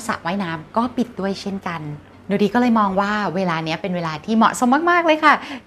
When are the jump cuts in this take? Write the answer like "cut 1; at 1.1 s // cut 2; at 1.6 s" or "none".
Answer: none